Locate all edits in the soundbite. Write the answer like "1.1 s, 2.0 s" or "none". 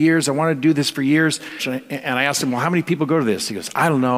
1.6 s